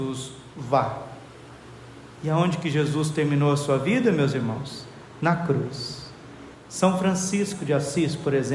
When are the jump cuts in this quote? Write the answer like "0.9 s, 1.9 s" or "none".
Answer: 6.5 s